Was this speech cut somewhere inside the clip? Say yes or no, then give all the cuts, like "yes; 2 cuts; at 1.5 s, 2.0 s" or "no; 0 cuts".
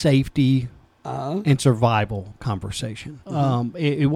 yes; 1 cut; at 3.2 s